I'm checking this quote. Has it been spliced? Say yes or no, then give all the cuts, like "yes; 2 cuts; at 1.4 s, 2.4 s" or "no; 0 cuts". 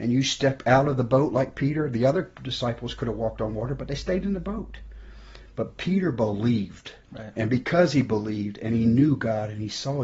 yes; 1 cut; at 7.0 s